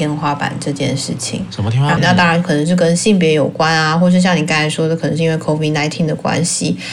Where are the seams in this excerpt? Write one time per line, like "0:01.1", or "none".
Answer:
0:02.0